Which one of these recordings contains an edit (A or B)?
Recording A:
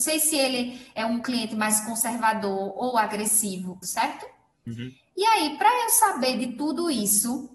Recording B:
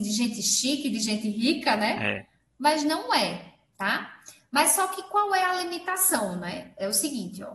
A